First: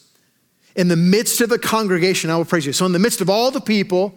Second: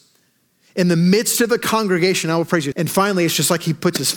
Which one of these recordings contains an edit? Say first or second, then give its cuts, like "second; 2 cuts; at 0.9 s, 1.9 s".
second; 1 cut; at 2.7 s